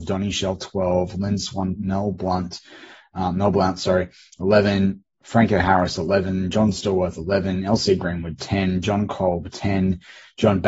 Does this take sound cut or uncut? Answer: cut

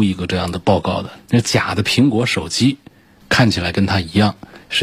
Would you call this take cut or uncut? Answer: cut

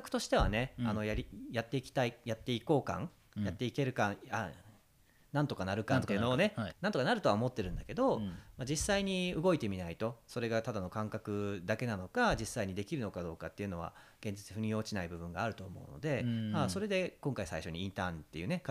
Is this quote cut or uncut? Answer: cut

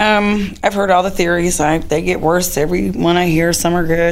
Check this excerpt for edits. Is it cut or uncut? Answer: uncut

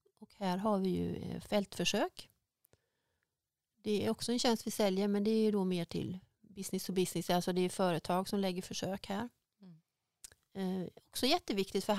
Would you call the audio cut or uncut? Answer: uncut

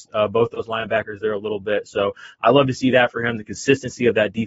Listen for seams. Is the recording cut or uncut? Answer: uncut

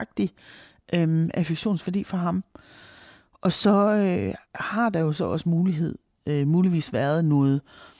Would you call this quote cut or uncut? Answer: cut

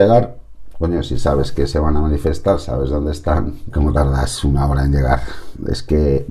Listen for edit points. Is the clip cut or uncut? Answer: cut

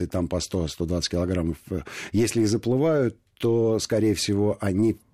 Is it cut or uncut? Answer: uncut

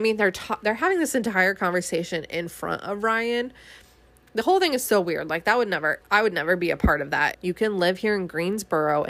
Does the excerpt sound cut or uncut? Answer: cut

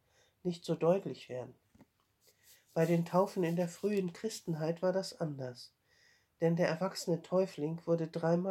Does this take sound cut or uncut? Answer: uncut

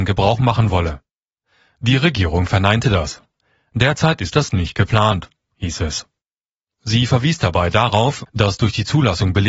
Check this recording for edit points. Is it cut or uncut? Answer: uncut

